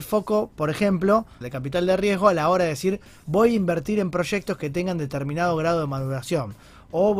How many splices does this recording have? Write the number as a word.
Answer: one